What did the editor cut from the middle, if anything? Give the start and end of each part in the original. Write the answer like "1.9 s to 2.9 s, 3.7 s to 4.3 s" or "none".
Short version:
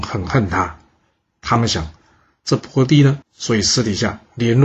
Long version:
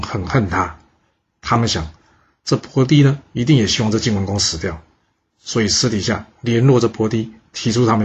3.2 s to 5.3 s